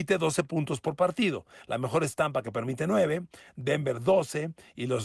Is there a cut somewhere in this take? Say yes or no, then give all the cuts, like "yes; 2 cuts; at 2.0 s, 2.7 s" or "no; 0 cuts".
no; 0 cuts